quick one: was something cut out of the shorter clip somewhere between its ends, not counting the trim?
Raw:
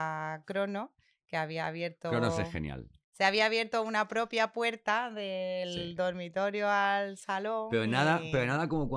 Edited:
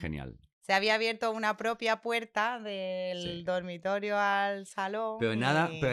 no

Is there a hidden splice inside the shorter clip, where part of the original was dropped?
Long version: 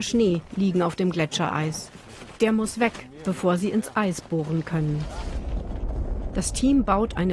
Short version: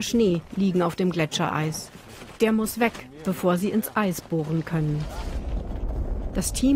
no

